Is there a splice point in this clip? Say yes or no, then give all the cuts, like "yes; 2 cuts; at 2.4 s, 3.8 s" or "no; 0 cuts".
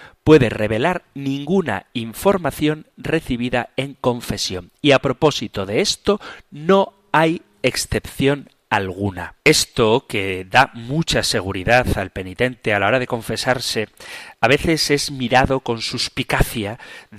yes; 1 cut; at 9.4 s